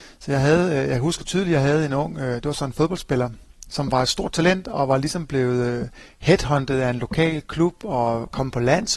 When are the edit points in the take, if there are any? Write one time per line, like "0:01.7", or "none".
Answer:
0:03.7